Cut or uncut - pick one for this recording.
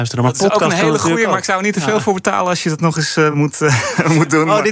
uncut